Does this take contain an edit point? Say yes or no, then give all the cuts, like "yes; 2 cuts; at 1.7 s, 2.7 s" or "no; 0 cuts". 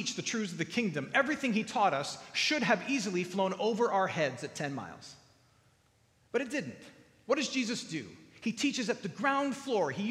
no; 0 cuts